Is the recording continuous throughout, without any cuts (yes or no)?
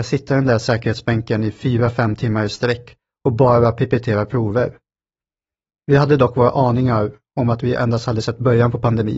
no